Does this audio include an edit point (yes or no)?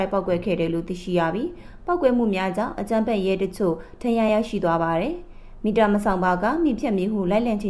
no